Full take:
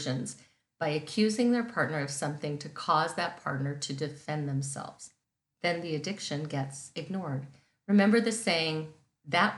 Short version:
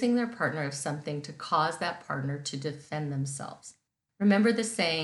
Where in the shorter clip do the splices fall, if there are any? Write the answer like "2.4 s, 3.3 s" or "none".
4.1 s

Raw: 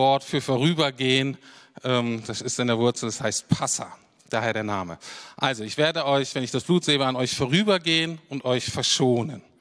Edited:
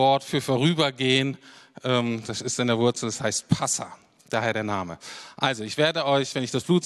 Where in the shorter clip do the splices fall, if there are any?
none

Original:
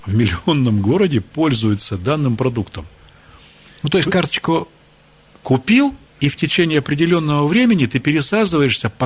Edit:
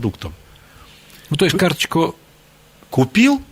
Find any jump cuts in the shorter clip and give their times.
none

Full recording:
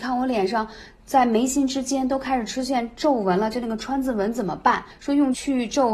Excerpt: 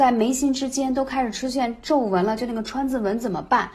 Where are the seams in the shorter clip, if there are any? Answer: none

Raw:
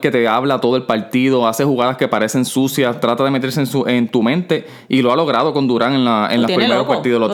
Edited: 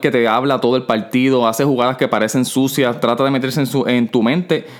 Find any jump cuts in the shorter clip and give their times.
none

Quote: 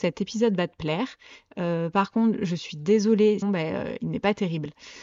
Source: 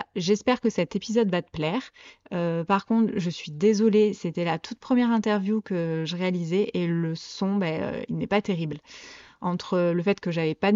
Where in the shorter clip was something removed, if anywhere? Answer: 3.4 s

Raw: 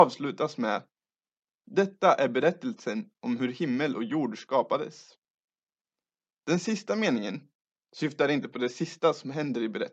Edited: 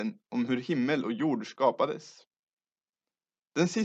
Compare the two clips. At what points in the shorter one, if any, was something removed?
none

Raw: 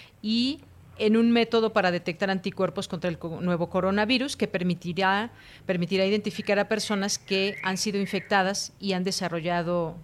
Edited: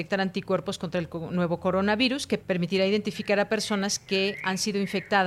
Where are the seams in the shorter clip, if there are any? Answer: 2.4 s

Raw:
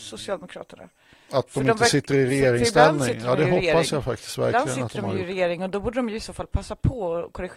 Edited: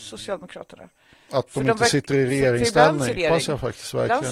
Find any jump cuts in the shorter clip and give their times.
3.2 s

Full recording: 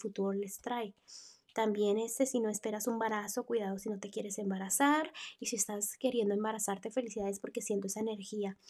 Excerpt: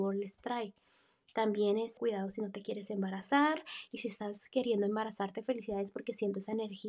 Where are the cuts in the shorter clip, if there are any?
2.0 s

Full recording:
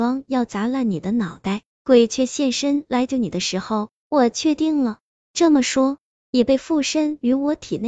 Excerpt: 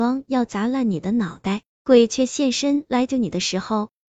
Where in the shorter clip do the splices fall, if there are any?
none

